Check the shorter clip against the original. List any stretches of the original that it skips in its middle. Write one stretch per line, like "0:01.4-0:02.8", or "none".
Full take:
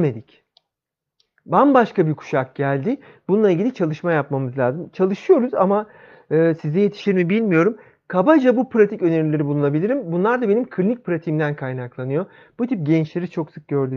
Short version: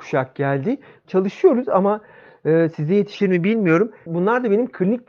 0:03.2-0:04.9
0:07.9-0:10.0